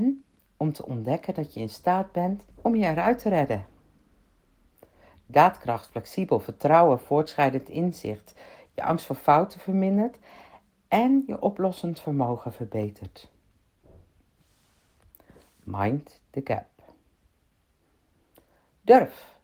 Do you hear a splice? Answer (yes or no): yes